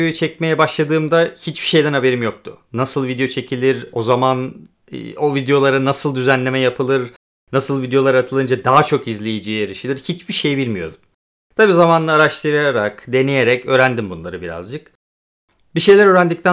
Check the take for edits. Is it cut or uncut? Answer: uncut